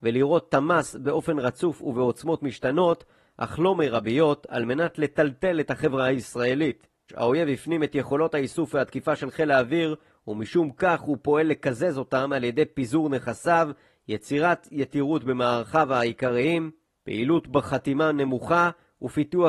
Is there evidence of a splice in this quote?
yes; 1 cut; at 7.1 s

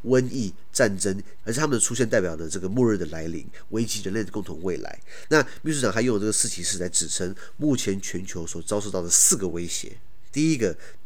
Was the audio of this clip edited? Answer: yes; 1 cut; at 1.4 s

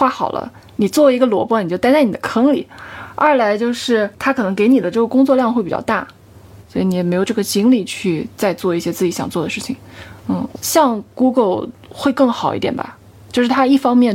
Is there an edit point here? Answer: yes; 2 cuts; at 6.6 s, 10.5 s

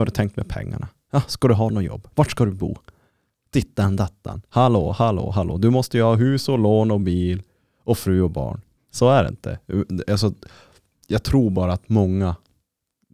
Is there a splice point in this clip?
yes; 1 cut; at 8.8 s

